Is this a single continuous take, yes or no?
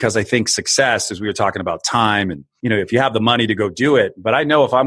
yes